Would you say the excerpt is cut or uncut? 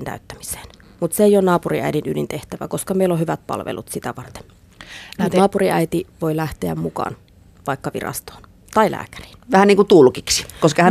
uncut